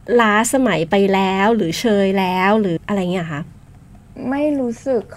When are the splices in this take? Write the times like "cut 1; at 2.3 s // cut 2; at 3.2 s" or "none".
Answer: cut 1; at 2.8 s